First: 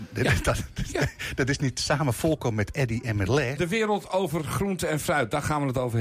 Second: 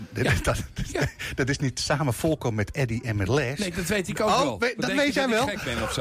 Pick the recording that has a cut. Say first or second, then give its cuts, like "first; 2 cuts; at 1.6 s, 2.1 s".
first; 1 cut; at 3.6 s